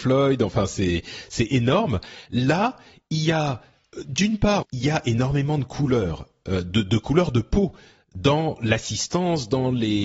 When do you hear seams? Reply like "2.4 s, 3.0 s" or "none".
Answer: 4.6 s